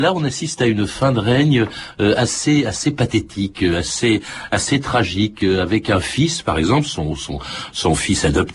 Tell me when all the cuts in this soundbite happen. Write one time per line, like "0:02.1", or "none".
none